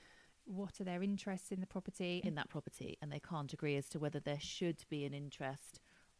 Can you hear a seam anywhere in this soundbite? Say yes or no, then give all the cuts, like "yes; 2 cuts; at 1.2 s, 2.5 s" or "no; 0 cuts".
yes; 1 cut; at 2.2 s